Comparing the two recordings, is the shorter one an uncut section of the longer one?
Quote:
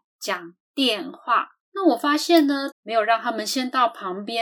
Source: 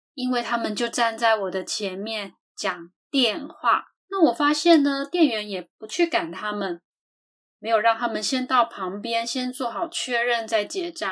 no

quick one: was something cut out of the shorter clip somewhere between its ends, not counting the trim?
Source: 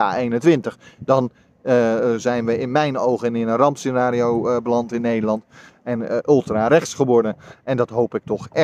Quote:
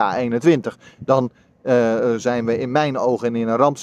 no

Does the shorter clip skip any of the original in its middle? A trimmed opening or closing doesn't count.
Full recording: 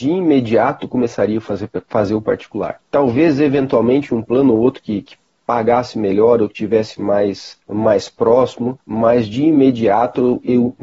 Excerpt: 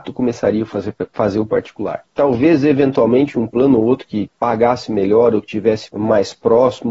yes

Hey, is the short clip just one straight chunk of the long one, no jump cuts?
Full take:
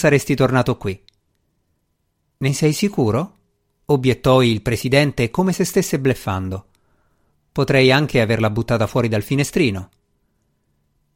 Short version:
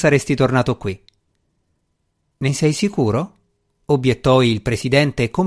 yes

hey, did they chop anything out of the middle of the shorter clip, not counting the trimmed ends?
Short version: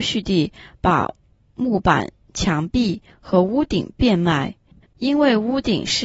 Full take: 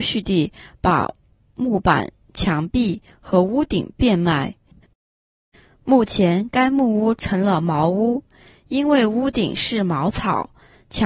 yes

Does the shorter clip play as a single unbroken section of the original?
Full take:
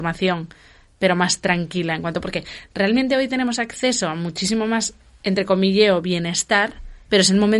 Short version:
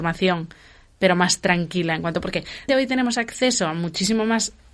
no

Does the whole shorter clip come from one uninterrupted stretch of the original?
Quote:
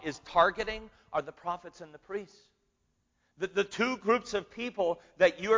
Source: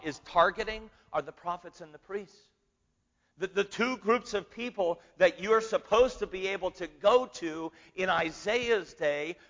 yes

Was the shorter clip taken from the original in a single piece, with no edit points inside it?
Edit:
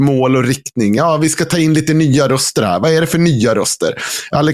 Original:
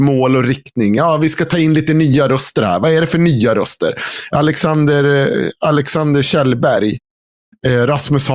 yes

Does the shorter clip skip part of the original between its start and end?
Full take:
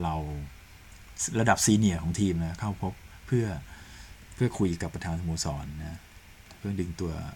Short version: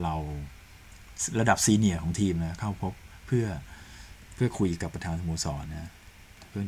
yes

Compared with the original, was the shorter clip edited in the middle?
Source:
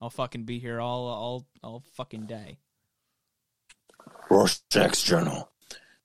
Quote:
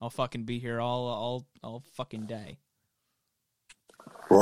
no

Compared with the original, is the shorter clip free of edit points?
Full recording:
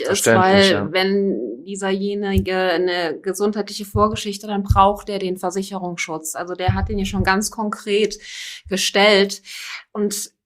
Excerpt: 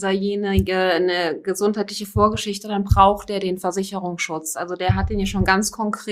yes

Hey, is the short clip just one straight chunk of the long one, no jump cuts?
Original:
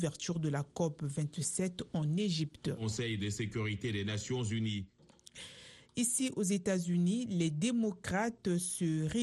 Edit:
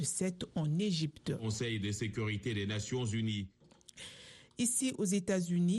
yes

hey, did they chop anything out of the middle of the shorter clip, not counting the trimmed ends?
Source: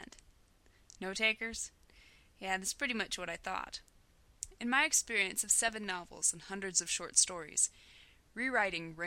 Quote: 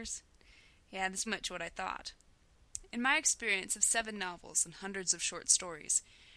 yes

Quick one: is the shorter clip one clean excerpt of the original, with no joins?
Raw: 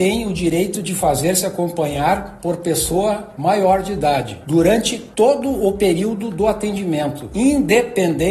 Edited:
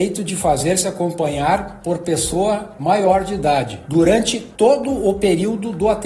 yes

